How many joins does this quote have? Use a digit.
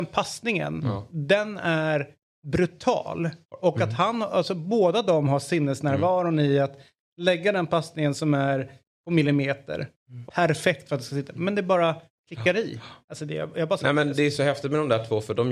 1